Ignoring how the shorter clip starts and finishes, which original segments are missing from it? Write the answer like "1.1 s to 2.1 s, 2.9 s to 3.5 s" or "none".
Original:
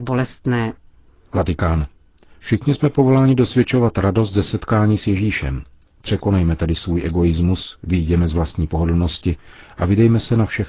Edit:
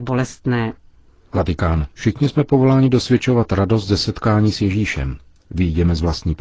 1.9 s to 2.4 s, 5.9 s to 7.8 s